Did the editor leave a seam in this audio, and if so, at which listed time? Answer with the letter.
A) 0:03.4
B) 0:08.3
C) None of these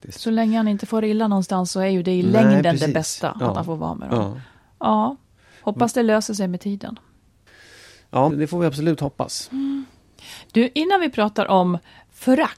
B